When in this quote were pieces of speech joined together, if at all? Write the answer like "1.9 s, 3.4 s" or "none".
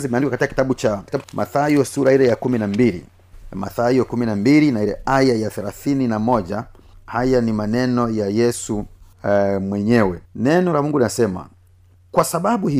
1.2 s, 10.3 s